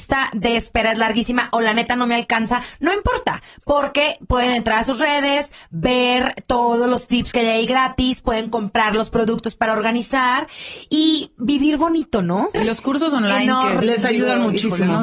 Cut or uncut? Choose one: cut